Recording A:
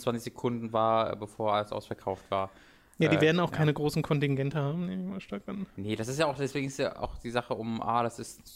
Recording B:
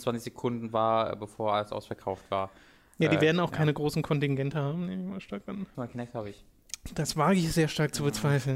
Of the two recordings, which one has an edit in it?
B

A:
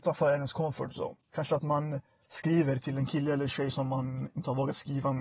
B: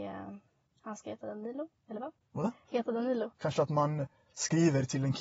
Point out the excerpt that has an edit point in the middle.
B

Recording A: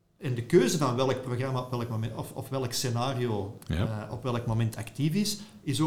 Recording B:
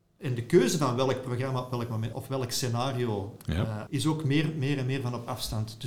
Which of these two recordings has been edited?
B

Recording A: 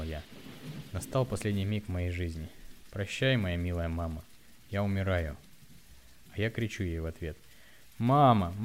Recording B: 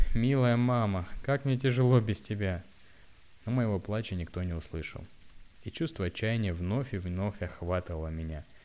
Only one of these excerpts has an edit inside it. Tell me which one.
A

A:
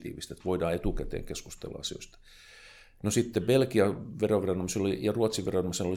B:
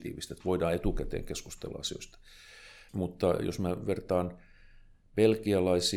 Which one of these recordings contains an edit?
B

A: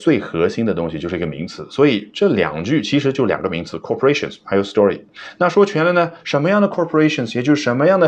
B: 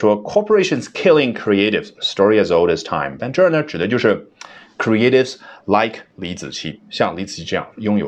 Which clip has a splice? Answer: B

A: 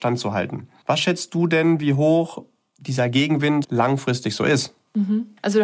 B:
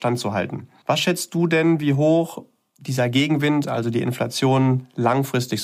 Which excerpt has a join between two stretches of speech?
A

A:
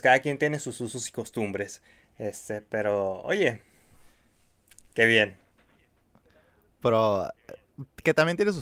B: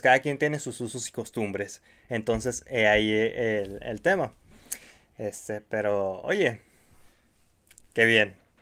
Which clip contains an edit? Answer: A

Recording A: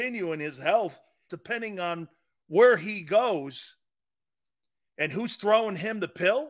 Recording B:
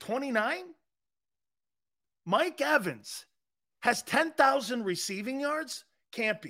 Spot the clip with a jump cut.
A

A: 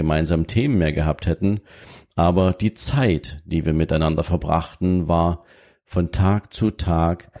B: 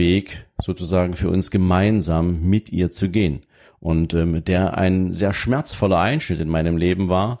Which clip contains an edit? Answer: B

